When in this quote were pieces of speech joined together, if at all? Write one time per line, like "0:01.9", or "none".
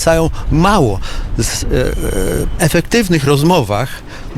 0:02.6